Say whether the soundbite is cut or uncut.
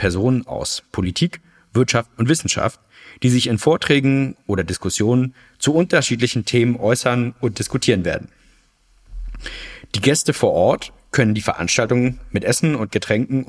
uncut